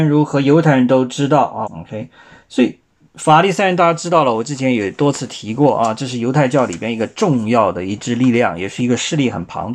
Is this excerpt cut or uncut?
cut